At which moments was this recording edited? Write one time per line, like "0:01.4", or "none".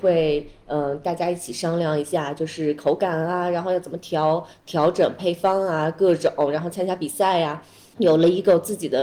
none